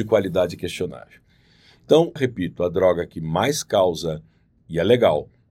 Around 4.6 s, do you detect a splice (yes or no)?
no